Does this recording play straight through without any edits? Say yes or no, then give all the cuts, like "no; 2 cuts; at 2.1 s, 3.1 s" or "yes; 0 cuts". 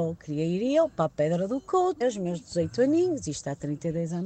no; 1 cut; at 2.0 s